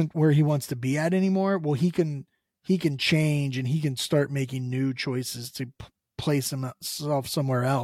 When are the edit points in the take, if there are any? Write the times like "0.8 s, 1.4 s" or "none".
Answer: none